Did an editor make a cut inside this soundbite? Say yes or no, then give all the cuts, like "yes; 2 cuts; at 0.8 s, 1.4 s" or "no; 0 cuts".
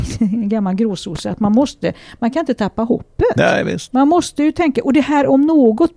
no; 0 cuts